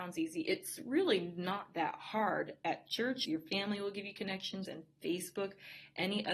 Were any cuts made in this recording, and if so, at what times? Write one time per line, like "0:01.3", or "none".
0:03.3
0:04.7

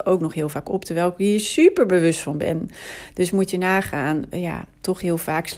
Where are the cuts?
0:04.3

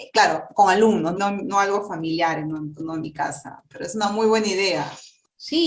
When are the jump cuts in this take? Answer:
0:01.2

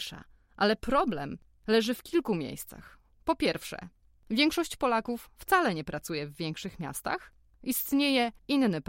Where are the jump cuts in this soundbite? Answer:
0:07.5

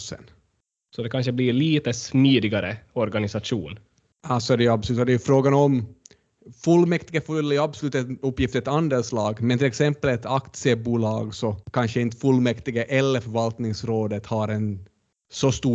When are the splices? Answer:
0:04.1
0:11.6

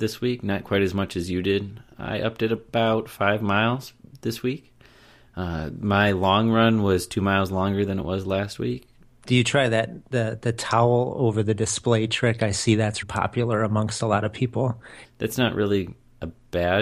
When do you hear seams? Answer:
0:09.1
0:13.0
0:15.0

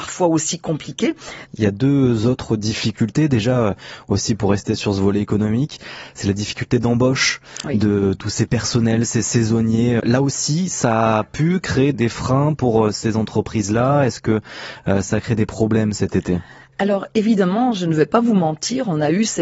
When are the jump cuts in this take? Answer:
0:01.5
0:10.0
0:11.9

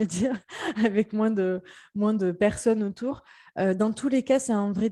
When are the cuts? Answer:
none

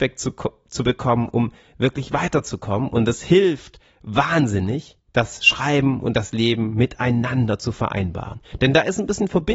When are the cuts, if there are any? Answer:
none

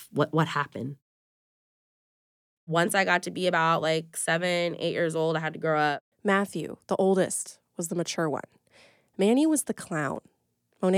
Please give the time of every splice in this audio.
0:02.6
0:06.1

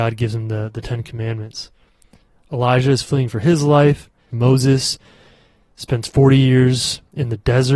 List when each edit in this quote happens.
0:02.4
0:04.3

